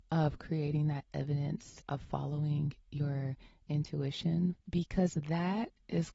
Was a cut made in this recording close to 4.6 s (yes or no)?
yes